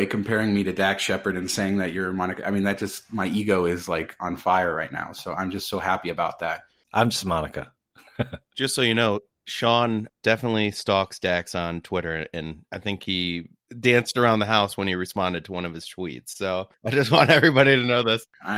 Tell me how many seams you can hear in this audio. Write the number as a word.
one